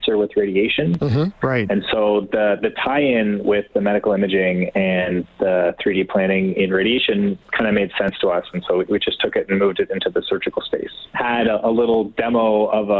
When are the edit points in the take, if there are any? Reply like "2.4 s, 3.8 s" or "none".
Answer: 1.4 s, 11.1 s